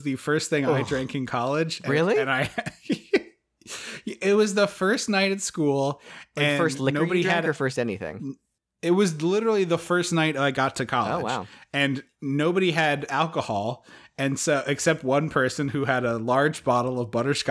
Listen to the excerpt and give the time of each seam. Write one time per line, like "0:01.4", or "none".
none